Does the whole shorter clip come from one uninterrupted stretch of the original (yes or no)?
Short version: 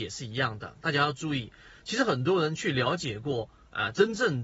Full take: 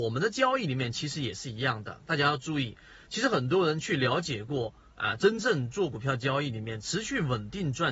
yes